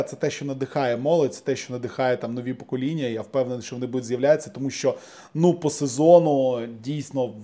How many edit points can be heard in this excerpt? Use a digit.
0